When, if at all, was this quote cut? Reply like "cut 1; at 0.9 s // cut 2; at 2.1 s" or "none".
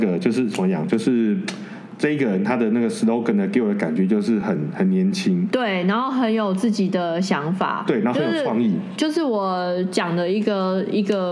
none